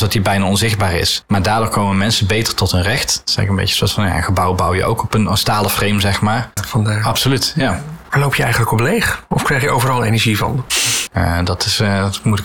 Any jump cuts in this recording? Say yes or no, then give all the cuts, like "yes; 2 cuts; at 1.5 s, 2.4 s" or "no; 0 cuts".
yes; 2 cuts; at 6.6 s, 11.1 s